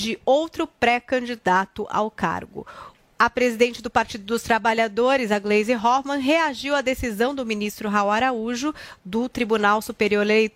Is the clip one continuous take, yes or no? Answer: yes